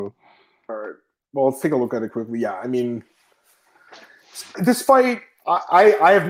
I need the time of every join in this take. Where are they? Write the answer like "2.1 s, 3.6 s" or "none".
4.5 s